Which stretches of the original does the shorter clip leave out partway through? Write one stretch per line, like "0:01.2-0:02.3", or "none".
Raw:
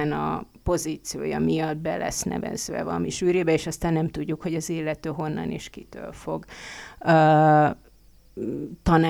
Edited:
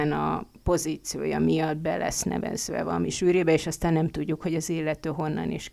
none